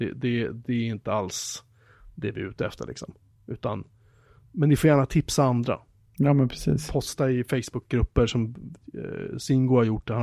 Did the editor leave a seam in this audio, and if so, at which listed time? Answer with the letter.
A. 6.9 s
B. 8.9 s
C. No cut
C